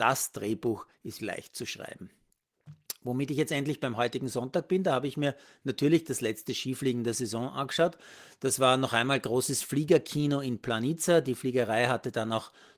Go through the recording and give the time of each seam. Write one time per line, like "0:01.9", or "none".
0:01.2